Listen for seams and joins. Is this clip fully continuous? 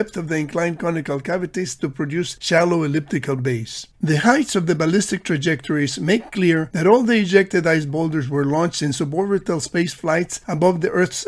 no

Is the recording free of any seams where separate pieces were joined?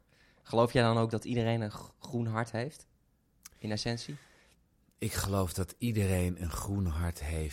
yes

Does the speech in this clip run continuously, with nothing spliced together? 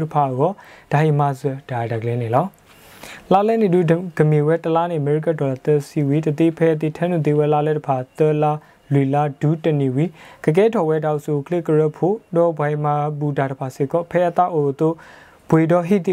yes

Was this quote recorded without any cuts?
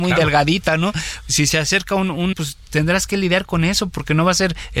no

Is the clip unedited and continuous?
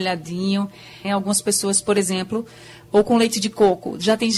no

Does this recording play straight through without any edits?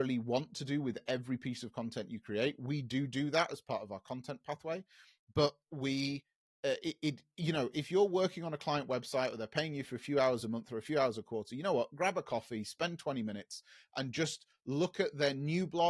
yes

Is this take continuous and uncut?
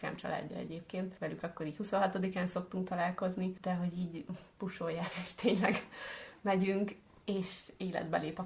yes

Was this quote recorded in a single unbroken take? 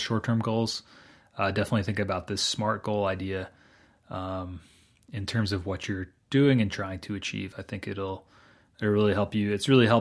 yes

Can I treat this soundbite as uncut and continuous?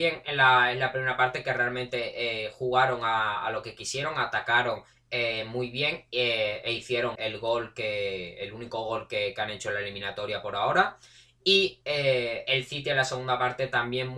no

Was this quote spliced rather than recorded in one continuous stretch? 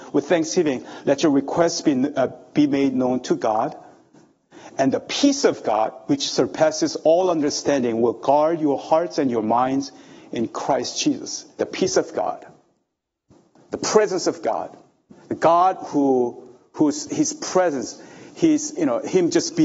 yes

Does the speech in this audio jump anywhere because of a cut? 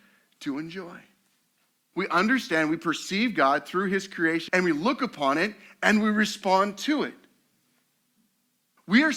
yes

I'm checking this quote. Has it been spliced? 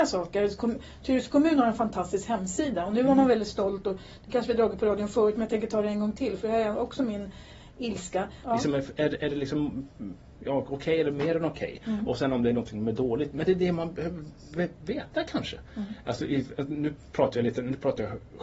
yes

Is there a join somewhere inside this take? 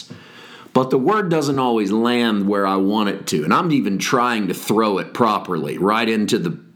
no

